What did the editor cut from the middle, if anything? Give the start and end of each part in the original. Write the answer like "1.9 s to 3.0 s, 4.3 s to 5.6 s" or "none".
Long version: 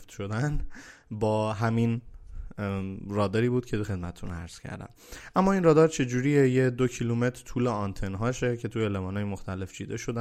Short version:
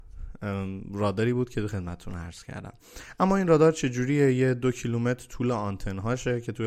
none